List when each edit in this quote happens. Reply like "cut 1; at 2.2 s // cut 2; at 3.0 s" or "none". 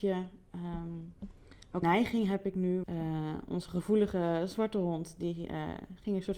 cut 1; at 1.8 s // cut 2; at 2.8 s